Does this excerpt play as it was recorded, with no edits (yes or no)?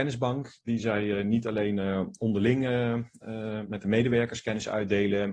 yes